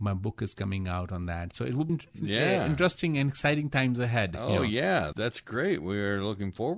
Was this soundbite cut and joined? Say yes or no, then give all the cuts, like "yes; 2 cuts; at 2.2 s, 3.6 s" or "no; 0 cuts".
yes; 2 cuts; at 1.9 s, 5.1 s